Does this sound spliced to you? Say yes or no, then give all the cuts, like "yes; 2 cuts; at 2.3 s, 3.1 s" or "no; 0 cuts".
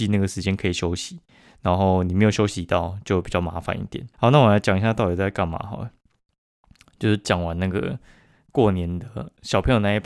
yes; 1 cut; at 4.1 s